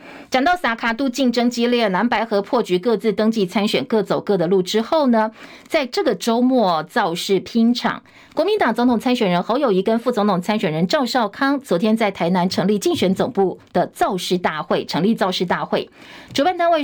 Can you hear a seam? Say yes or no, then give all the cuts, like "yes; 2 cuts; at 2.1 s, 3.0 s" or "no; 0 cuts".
no; 0 cuts